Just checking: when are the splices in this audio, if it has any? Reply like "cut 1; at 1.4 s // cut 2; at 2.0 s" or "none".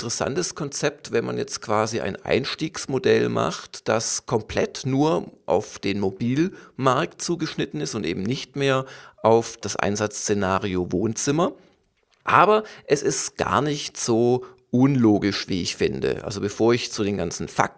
none